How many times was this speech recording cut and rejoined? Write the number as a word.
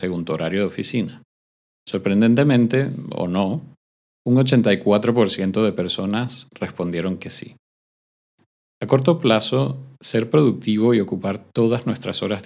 zero